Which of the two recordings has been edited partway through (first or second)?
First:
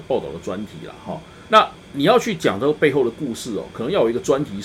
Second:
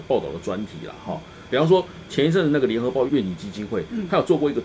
second